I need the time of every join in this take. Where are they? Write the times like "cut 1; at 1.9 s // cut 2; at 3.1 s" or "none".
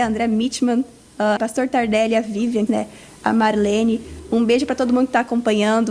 cut 1; at 1.4 s // cut 2; at 2.7 s